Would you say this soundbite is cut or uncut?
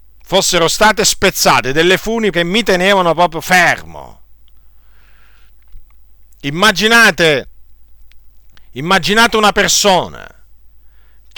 cut